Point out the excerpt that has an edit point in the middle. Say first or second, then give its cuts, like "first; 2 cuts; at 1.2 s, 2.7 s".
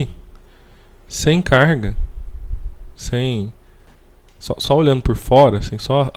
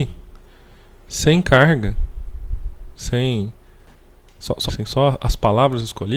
second; 1 cut; at 4.7 s